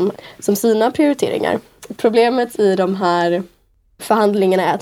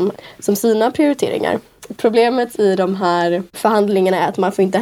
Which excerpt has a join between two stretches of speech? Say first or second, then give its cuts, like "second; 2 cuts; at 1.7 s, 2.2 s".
second; 1 cut; at 3.5 s